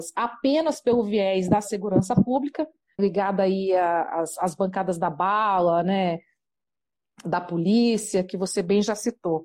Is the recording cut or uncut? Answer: cut